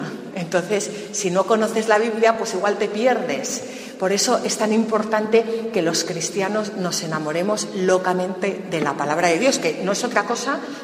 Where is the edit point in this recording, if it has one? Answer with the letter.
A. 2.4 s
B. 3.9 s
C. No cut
C